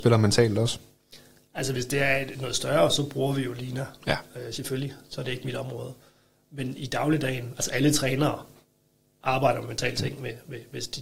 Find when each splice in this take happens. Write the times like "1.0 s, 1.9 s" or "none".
none